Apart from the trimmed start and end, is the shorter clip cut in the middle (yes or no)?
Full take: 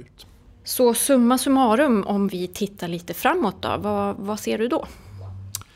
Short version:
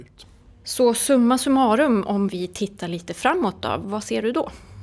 yes